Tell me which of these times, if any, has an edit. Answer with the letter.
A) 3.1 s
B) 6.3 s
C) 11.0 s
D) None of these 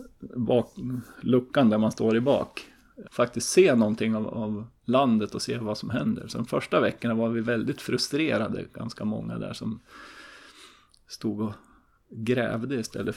A